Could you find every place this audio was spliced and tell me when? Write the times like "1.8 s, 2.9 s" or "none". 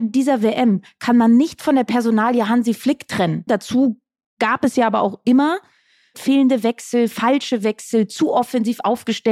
3.5 s, 6.1 s